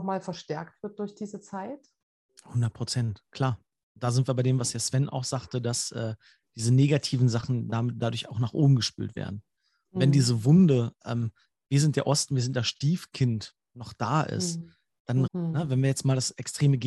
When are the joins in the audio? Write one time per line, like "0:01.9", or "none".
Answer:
0:15.3